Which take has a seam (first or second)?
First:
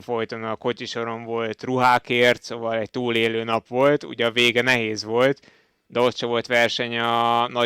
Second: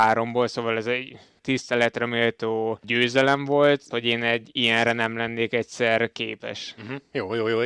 second